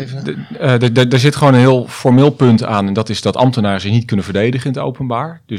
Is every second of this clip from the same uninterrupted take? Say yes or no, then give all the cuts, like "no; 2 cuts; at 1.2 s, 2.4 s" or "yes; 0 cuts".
yes; 0 cuts